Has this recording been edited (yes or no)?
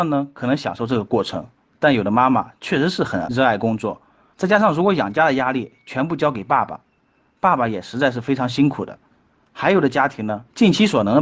no